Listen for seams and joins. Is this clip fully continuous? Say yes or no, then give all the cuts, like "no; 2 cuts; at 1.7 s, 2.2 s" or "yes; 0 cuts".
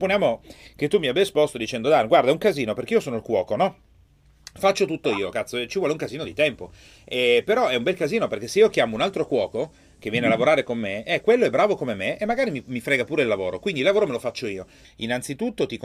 no; 1 cut; at 14.8 s